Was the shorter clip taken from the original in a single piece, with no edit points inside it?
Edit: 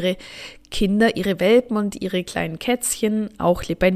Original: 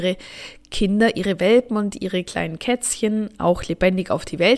yes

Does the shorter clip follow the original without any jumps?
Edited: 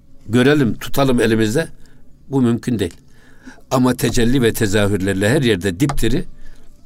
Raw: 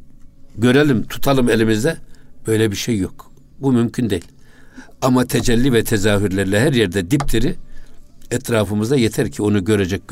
no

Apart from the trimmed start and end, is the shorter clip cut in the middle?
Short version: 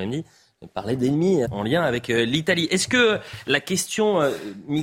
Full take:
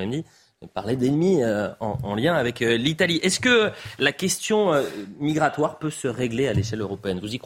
yes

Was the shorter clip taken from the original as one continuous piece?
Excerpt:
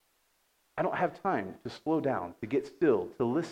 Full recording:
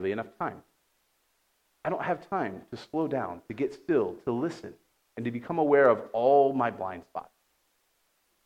yes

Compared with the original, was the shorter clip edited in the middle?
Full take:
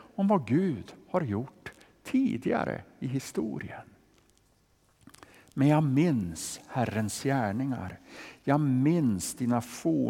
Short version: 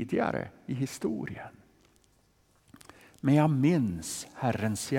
no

